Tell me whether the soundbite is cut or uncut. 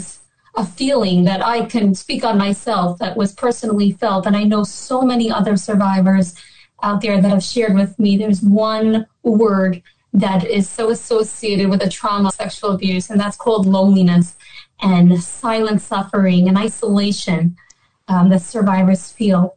cut